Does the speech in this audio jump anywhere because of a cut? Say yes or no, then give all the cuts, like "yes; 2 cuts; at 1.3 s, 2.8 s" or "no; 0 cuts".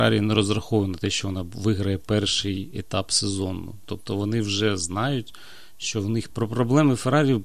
yes; 1 cut; at 6.3 s